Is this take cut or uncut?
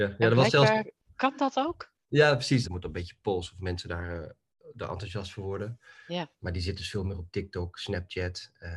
cut